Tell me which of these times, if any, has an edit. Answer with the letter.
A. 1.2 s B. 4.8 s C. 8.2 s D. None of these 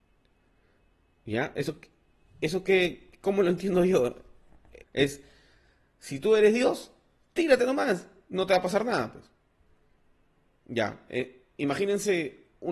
B